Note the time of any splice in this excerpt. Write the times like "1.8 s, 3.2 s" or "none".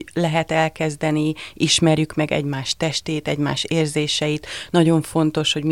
none

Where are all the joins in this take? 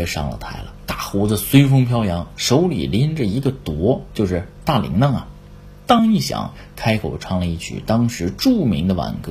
6.0 s

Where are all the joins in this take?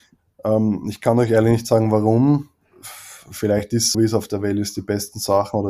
3.9 s

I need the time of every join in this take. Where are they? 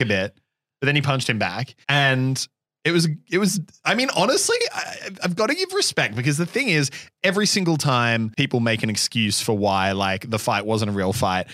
1.8 s

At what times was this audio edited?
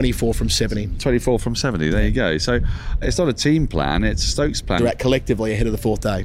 3.0 s, 4.8 s

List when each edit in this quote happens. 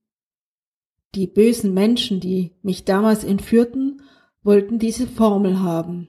none

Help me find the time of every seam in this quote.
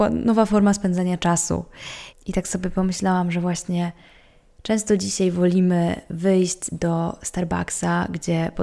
2.1 s

